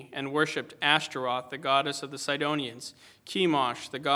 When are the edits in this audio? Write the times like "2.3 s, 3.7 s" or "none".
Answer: none